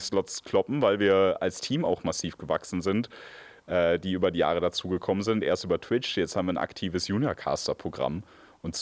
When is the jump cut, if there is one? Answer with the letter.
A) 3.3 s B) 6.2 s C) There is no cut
C